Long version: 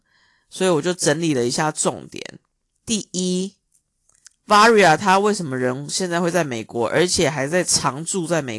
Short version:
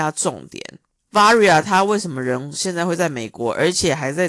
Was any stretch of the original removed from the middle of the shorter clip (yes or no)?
yes